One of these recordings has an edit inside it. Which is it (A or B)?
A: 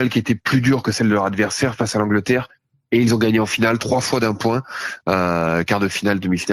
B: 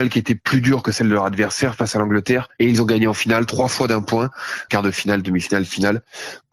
B